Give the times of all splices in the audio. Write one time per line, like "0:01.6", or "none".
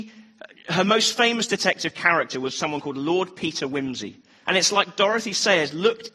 0:04.4